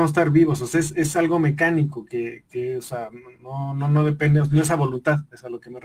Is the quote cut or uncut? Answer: uncut